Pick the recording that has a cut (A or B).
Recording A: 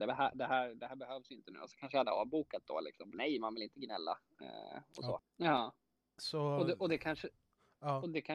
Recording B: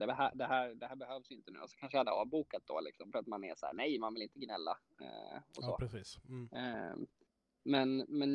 A